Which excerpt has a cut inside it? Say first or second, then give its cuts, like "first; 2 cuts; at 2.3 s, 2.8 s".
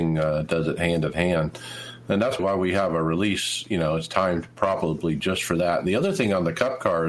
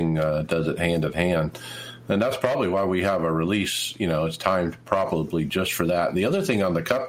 first; 1 cut; at 2.4 s